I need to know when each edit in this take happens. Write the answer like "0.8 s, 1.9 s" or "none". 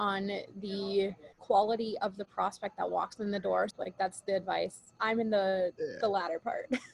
1.3 s, 3.7 s, 5.0 s